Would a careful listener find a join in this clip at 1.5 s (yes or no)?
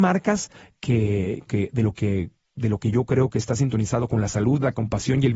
yes